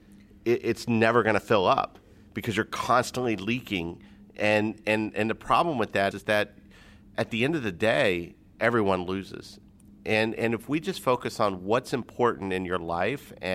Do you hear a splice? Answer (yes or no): yes